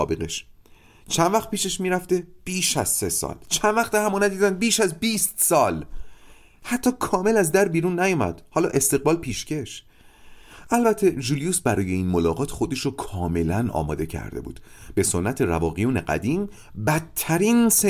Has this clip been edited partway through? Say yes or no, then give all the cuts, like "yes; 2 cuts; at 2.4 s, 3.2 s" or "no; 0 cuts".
no; 0 cuts